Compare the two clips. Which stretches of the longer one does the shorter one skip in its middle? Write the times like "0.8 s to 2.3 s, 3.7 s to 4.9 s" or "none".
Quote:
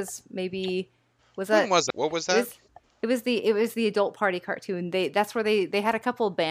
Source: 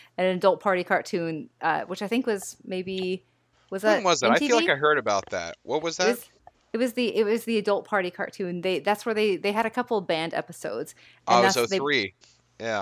4.2 s to 5.6 s